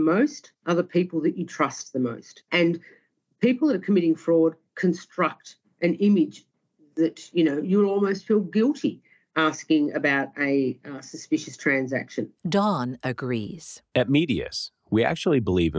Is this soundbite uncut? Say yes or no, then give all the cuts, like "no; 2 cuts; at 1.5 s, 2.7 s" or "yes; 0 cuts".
no; 1 cut; at 2.5 s